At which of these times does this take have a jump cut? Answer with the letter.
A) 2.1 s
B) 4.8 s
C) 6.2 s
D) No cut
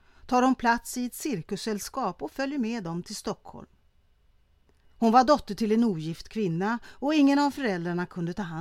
B